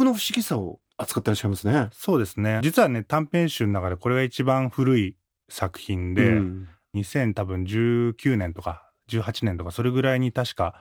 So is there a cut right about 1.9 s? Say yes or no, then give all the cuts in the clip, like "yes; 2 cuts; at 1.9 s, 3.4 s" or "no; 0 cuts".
no; 0 cuts